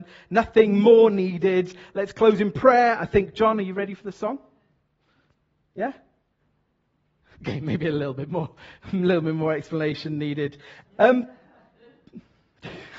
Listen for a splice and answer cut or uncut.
cut